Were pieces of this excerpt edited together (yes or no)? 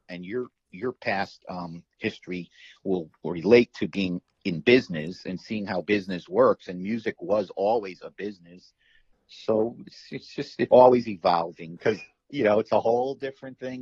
yes